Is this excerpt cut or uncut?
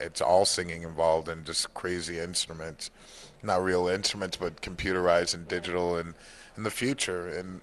uncut